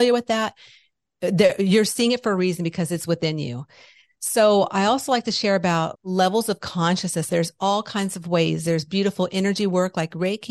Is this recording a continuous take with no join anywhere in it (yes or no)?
no